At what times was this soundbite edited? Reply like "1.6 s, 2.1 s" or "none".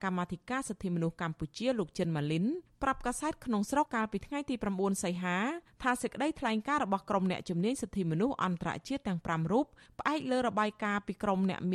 3.9 s